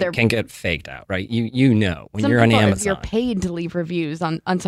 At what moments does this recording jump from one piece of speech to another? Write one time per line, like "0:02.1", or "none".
none